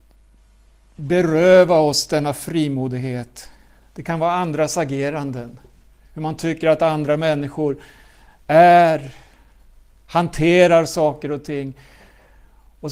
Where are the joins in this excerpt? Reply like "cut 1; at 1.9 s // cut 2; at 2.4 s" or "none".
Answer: none